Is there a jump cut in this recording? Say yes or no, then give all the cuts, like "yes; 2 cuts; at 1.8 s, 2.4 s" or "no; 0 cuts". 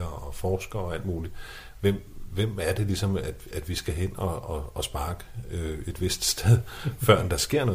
no; 0 cuts